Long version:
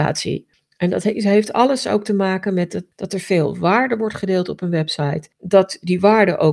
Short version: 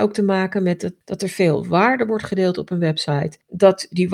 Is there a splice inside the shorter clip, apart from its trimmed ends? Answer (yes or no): no